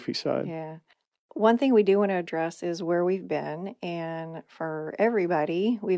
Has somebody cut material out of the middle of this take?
no; 0 cuts

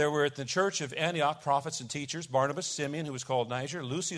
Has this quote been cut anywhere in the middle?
no; 0 cuts

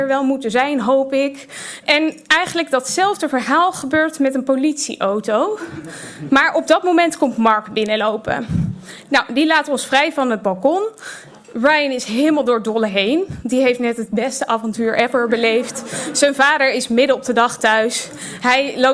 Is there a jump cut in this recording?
yes; 1 cut; at 1.8 s

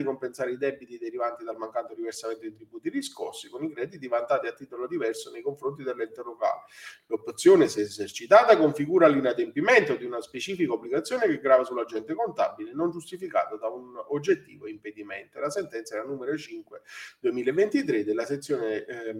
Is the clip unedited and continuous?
yes; 0 cuts

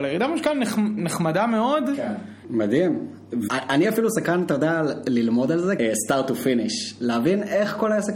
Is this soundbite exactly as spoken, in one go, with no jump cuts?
no; 3 cuts; at 2.4 s, 3.5 s, 5.8 s

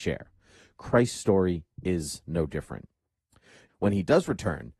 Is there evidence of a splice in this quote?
yes; 1 cut; at 3.7 s

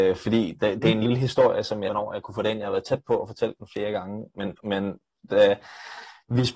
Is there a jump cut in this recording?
yes; 2 cuts; at 1.9 s, 4.6 s

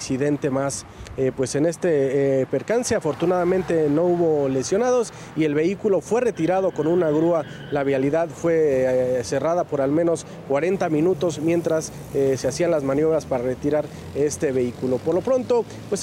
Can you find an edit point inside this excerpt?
no; 0 cuts

